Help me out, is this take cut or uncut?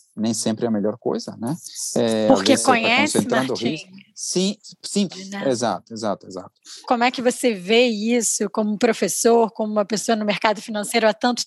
cut